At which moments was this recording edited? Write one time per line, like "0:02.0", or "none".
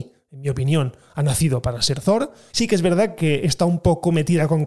0:02.5